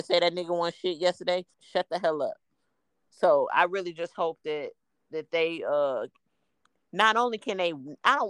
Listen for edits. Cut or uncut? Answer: cut